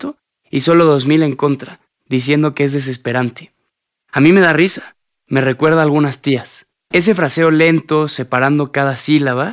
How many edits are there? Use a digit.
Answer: 1